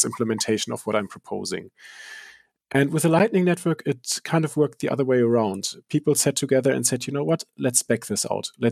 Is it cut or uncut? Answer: uncut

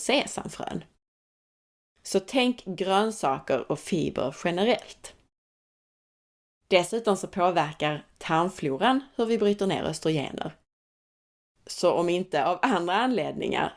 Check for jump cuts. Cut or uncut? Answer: uncut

